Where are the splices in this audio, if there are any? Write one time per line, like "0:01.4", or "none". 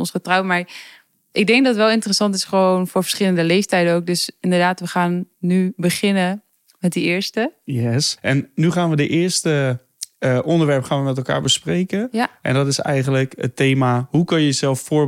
0:08.2